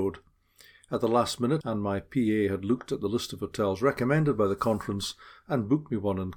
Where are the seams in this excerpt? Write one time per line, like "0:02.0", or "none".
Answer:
0:01.6